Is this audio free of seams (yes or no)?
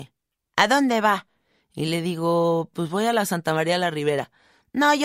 yes